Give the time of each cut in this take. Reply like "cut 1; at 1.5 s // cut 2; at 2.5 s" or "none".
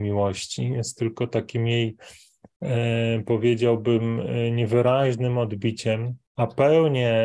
cut 1; at 6.2 s